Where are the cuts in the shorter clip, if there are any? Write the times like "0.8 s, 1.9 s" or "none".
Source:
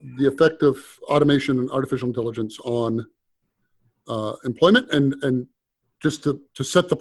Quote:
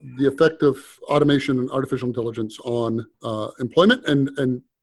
3.1 s